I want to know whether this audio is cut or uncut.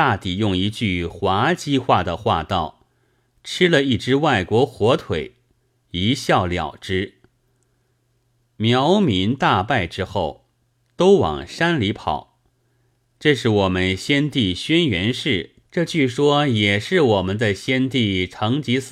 cut